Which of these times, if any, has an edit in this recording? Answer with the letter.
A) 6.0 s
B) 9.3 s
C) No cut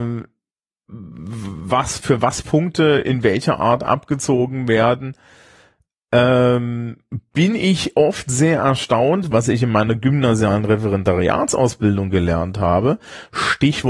B